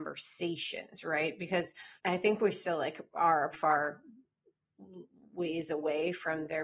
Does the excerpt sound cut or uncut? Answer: cut